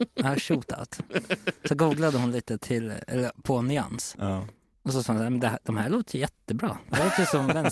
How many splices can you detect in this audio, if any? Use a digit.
0